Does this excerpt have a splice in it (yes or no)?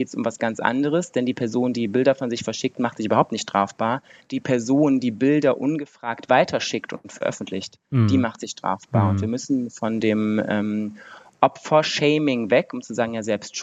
no